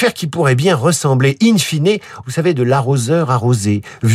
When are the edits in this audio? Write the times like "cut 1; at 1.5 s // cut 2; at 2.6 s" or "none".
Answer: cut 1; at 2.2 s